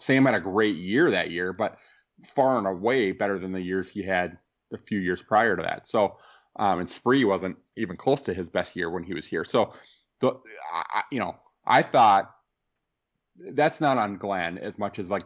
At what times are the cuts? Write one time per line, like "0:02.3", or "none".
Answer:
none